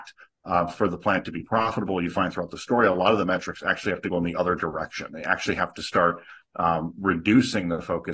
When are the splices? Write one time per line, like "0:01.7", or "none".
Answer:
none